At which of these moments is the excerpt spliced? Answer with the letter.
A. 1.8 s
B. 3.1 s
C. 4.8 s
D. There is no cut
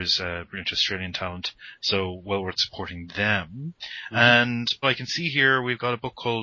C